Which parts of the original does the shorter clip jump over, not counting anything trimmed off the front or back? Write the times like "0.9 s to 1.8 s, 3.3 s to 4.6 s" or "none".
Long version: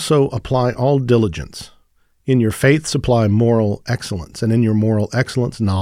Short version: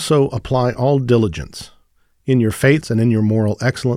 2.8 s to 4.3 s